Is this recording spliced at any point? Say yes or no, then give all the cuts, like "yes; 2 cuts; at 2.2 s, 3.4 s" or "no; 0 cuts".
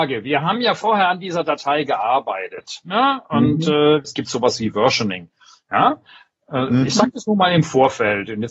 yes; 1 cut; at 4.0 s